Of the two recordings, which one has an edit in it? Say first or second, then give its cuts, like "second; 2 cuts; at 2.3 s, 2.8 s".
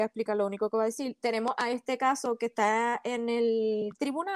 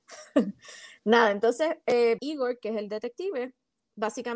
second; 1 cut; at 2.2 s